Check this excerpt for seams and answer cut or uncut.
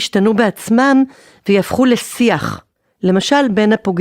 uncut